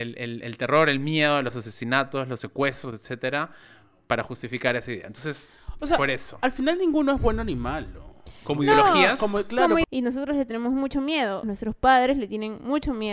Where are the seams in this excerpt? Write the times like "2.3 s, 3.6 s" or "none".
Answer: 9.8 s, 11.4 s